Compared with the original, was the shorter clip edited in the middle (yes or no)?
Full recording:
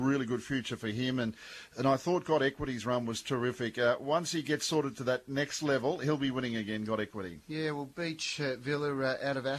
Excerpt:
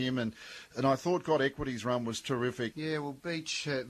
yes